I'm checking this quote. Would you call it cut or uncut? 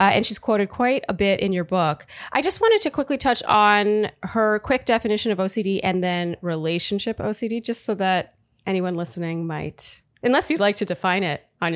uncut